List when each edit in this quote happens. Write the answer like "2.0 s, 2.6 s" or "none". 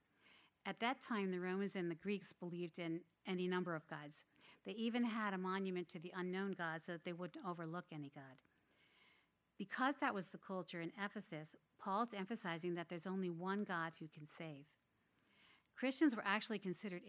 none